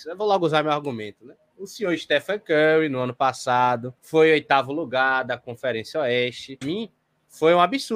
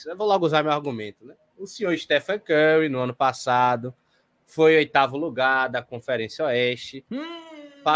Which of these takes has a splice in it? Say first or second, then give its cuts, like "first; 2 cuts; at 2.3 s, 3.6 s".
first; 2 cuts; at 4.0 s, 6.6 s